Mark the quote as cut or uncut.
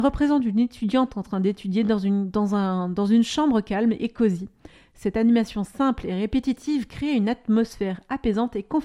uncut